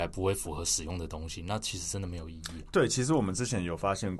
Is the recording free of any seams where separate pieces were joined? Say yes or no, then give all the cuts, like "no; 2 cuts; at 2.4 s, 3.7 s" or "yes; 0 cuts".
yes; 0 cuts